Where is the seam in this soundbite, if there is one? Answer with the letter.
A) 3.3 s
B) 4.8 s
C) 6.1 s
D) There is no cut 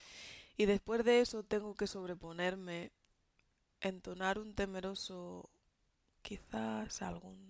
C